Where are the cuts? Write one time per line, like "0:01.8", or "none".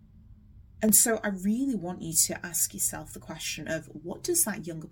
none